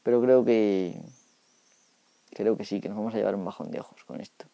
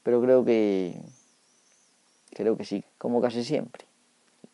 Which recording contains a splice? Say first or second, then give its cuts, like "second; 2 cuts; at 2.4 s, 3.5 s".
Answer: second; 1 cut; at 2.8 s